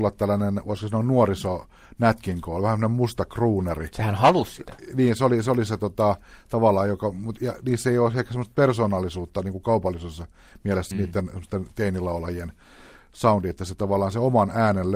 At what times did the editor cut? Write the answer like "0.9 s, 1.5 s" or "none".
10.9 s